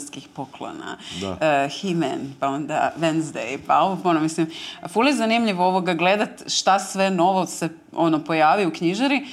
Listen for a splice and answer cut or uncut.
uncut